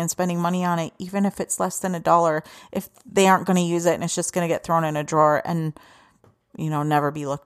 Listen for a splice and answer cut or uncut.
uncut